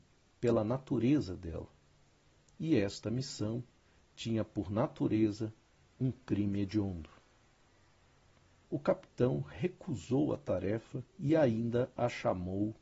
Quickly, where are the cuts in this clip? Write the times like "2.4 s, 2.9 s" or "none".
8.6 s, 11.1 s